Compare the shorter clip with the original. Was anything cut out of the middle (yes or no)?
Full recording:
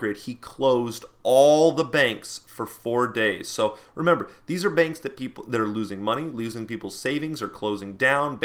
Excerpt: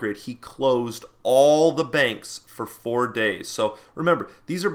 no